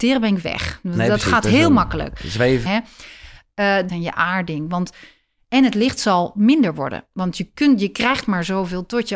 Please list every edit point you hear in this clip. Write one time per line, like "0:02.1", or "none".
0:02.7
0:03.9